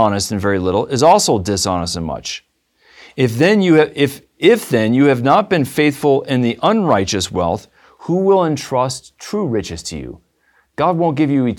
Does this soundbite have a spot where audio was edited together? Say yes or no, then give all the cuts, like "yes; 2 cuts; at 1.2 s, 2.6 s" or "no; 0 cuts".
no; 0 cuts